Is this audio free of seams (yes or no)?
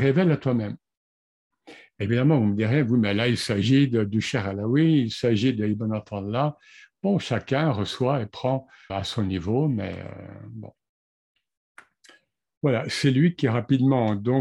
no